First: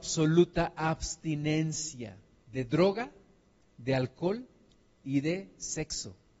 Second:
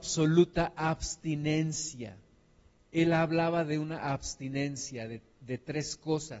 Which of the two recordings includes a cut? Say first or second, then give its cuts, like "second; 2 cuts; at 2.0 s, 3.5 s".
first; 1 cut; at 2.4 s